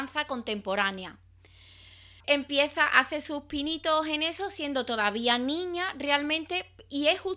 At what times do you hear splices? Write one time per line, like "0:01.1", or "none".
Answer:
0:02.2